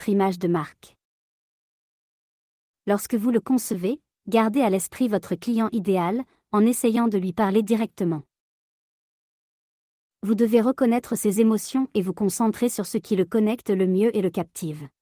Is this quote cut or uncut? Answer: uncut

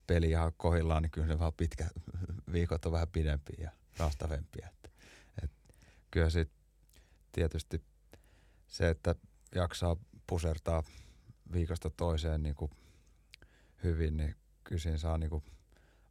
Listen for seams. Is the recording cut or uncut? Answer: uncut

